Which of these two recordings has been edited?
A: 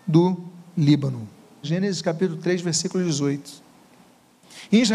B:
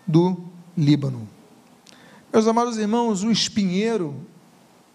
A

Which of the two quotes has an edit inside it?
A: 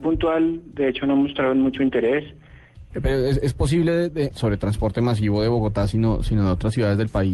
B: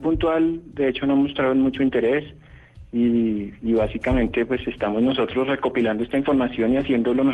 A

